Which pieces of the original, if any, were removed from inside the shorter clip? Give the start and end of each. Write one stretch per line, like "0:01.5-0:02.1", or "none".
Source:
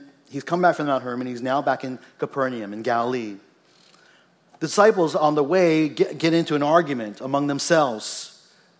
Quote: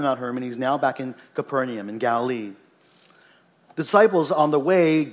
none